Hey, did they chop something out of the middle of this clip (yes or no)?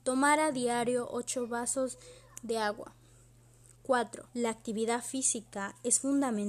yes